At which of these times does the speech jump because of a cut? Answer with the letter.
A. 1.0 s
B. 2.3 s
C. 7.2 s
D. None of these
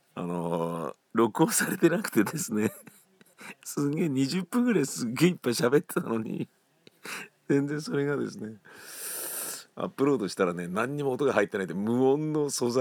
A